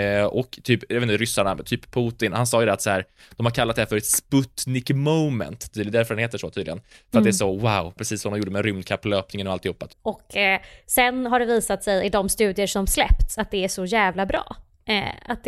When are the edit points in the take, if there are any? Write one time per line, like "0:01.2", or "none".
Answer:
0:08.0
0:09.9